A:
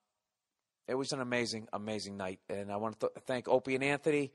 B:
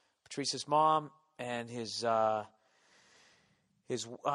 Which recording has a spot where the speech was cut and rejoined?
A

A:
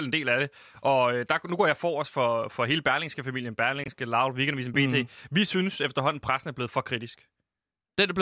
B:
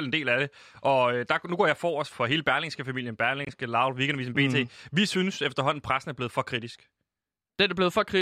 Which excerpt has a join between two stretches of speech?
B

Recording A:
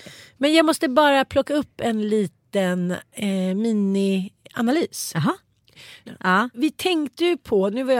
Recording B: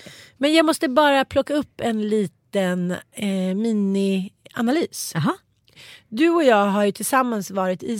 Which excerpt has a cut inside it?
A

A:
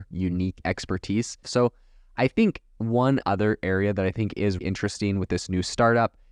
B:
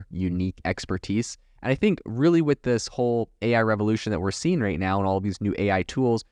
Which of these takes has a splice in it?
A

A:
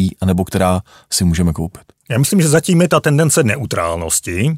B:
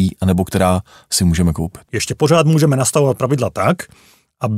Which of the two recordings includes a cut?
B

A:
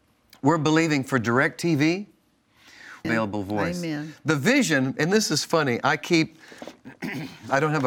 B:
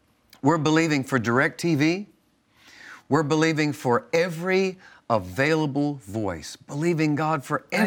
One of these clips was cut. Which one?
A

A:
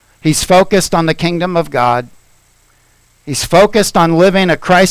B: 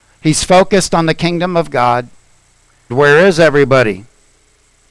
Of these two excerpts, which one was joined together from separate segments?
B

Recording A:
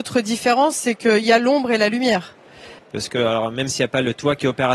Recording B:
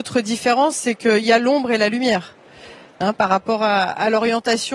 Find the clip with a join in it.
A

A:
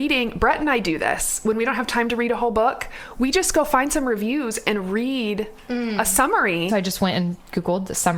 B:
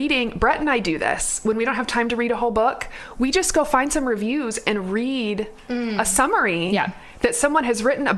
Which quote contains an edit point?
A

